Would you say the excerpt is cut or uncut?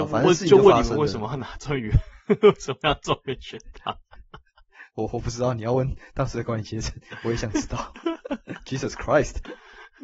uncut